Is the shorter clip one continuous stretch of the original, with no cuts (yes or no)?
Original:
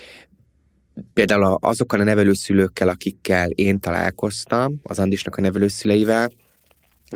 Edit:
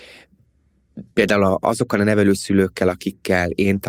yes